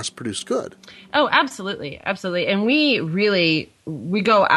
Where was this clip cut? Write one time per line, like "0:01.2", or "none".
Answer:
none

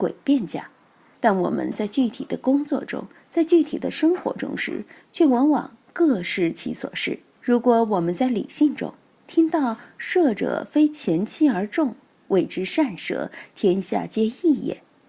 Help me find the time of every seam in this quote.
0:01.1
0:07.3

